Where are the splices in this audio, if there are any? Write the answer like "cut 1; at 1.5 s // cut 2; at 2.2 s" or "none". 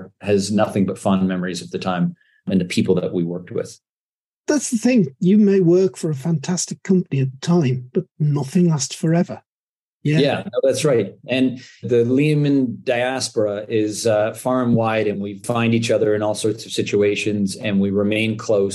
none